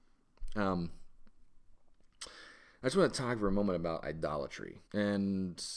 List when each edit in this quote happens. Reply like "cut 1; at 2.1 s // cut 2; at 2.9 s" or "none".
cut 1; at 4.9 s